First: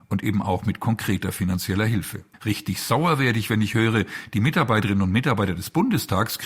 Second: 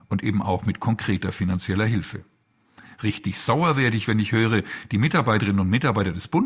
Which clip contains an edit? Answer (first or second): first